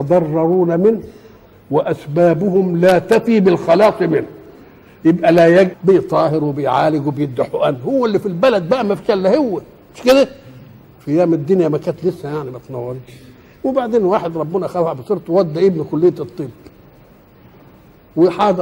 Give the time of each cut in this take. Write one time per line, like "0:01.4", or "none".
0:05.7

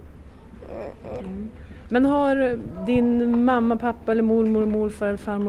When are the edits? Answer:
0:01.2

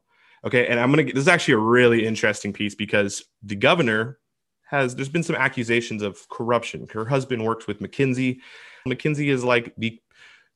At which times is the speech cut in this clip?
0:08.9

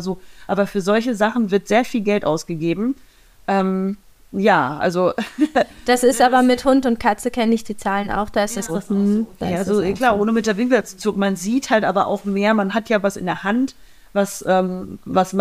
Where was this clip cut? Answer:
0:08.7

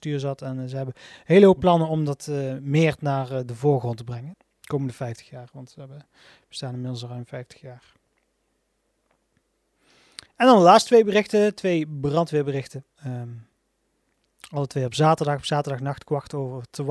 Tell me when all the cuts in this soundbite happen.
0:04.3

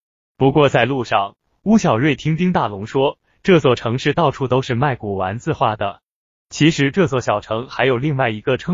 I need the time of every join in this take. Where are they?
none

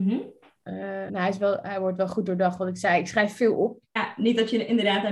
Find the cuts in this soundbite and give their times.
0:01.1
0:04.0

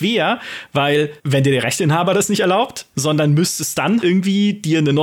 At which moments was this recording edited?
0:01.2
0:02.9
0:04.0

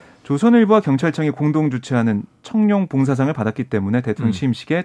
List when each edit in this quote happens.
none

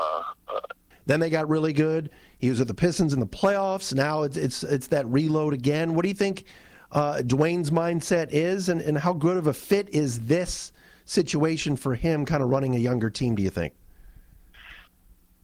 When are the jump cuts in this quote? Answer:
0:00.9

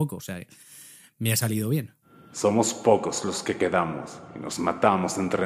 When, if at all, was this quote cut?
none

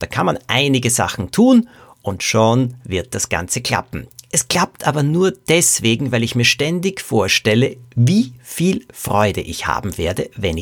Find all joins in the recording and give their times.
none

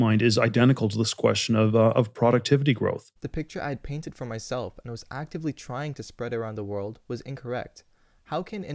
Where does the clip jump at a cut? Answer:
none

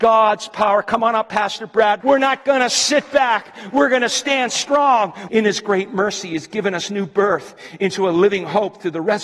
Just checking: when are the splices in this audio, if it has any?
0:02.0
0:05.3

